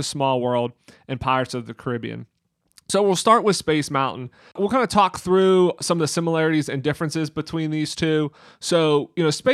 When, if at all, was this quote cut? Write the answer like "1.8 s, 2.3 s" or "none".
none